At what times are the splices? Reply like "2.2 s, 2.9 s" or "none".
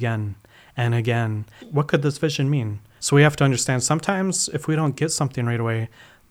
1.6 s, 3.0 s